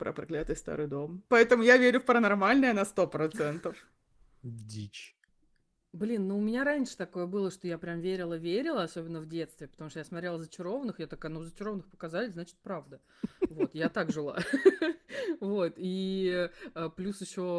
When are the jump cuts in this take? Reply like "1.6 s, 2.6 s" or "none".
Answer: 1.3 s